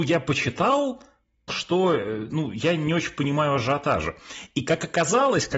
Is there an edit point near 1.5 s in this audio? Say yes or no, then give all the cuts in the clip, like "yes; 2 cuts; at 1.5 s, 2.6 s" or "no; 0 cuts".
yes; 1 cut; at 1.5 s